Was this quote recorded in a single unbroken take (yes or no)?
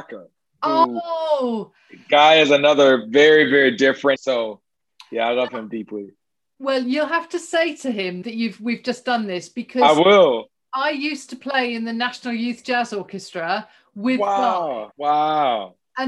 no